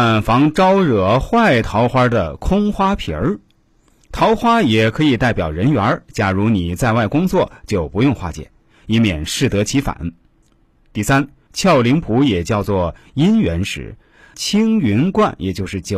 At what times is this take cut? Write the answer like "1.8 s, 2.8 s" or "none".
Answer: 11.5 s, 14.3 s